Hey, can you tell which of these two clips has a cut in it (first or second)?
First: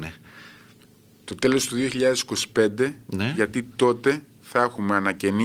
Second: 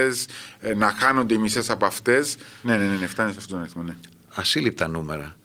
second